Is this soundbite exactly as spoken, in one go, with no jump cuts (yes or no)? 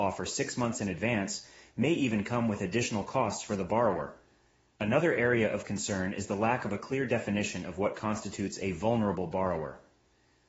yes